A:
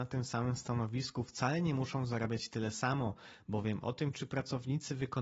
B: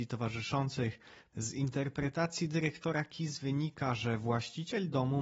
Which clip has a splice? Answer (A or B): B